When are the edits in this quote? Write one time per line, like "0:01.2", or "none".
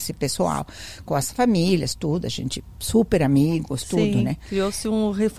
none